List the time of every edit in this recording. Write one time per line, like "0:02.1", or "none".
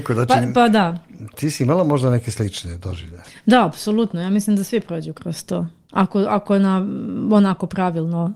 0:01.3